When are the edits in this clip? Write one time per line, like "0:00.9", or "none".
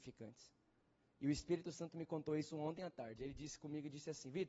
none

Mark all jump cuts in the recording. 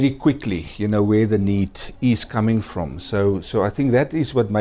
none

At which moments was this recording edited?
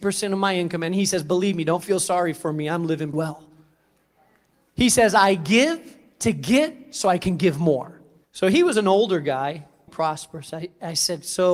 0:03.1
0:08.2
0:09.9

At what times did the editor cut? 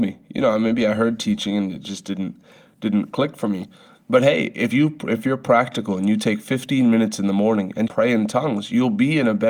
0:07.9

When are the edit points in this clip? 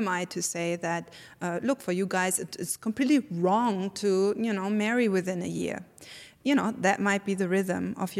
none

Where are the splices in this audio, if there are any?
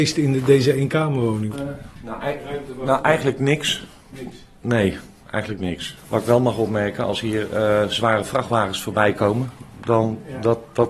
0:01.5

